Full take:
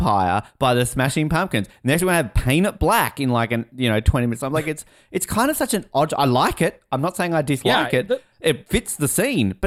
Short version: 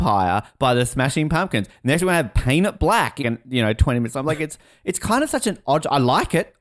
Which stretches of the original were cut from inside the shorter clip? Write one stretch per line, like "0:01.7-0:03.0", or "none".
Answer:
0:03.2-0:03.5